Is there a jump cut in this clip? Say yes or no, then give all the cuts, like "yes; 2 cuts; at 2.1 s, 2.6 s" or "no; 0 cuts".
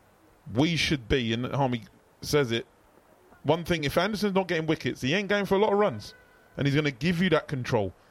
no; 0 cuts